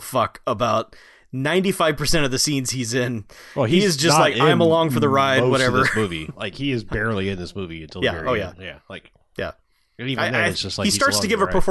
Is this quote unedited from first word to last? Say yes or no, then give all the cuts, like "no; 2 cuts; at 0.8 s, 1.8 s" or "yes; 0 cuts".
yes; 0 cuts